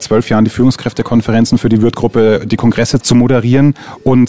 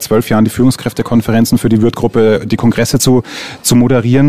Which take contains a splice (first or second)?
first